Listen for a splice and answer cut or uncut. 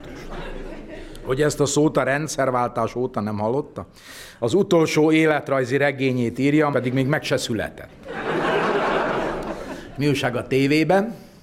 cut